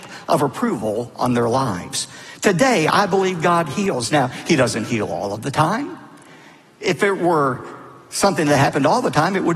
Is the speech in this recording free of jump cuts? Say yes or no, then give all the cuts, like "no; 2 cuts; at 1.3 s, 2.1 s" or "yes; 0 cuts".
yes; 0 cuts